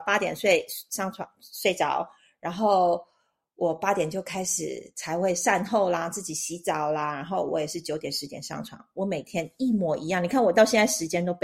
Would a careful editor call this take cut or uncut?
uncut